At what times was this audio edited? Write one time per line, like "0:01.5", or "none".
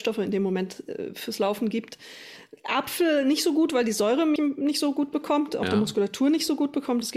0:04.4